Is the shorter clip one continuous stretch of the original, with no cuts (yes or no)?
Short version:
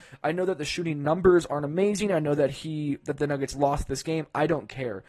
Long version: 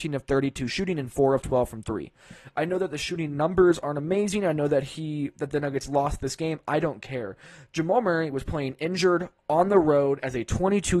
yes